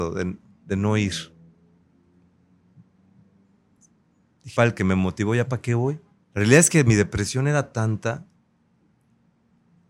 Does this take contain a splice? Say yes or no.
yes